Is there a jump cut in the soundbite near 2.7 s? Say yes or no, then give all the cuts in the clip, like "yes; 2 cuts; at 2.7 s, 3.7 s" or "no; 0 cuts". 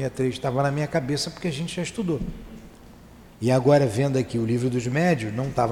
no; 0 cuts